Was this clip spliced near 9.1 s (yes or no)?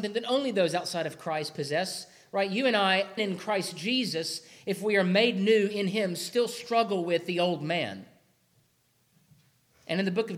no